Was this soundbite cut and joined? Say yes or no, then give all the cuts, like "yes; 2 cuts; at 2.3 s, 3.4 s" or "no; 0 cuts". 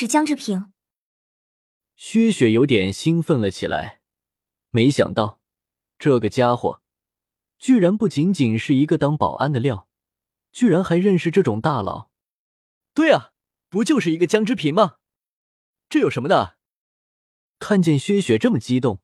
no; 0 cuts